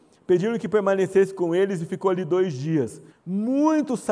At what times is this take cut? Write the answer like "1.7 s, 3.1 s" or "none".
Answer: 3.1 s